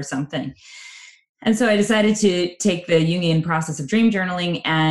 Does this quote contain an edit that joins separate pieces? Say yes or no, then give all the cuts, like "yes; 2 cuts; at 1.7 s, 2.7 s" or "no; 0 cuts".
no; 0 cuts